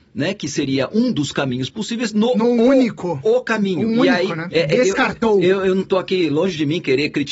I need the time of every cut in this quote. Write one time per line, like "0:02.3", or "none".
0:04.5